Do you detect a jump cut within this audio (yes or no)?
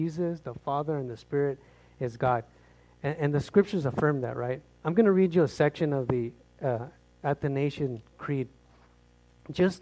no